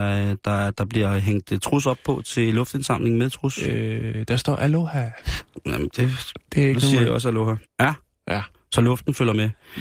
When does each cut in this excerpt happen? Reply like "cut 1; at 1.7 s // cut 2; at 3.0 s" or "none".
cut 1; at 7.6 s

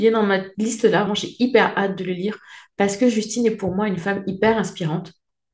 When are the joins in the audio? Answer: cut 1; at 1.1 s

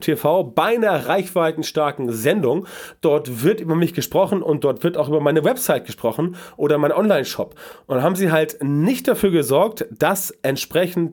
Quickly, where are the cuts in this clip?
none

